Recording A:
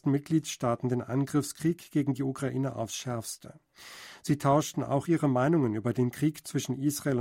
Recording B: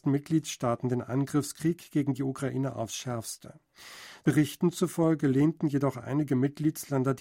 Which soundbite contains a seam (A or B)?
B